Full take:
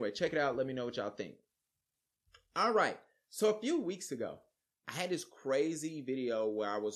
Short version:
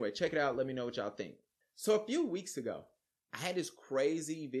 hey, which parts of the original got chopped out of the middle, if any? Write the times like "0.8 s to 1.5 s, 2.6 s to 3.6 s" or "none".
1.6 s to 3.2 s